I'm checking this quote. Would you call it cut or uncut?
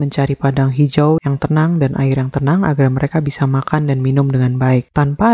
cut